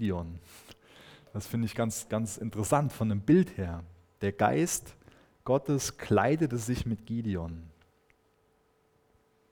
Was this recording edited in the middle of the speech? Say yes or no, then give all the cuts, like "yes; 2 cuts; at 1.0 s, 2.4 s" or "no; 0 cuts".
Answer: no; 0 cuts